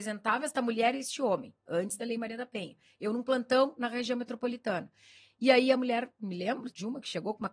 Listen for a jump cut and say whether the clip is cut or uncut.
uncut